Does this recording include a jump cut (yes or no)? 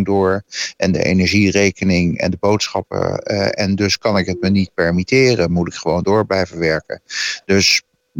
no